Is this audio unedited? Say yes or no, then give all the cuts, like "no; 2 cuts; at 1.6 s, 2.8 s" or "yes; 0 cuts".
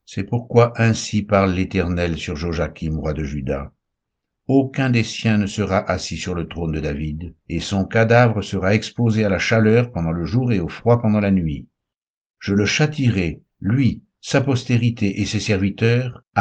no; 1 cut; at 7.4 s